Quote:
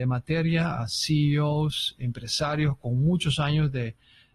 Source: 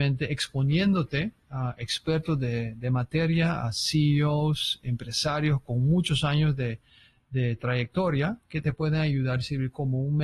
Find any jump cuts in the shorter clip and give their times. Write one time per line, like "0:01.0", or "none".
none